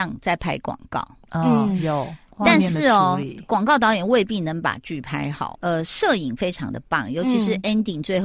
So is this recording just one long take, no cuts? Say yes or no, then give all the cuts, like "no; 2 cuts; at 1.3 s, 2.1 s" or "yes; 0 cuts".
no; 1 cut; at 5.5 s